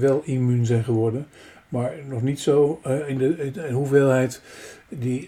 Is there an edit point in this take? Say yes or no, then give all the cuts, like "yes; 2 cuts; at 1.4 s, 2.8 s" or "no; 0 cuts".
no; 0 cuts